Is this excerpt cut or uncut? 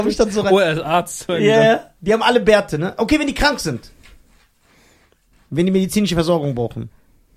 uncut